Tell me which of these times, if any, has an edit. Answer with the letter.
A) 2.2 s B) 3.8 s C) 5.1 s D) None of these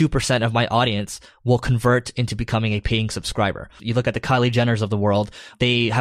B